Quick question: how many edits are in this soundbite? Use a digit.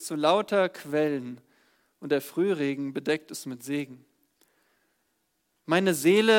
1